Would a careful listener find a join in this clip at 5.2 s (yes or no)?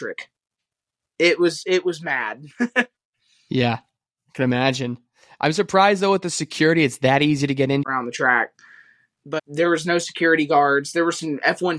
no